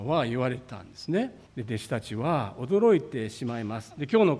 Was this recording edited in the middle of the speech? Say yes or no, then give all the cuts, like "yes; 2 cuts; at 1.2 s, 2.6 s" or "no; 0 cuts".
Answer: yes; 1 cut; at 1.5 s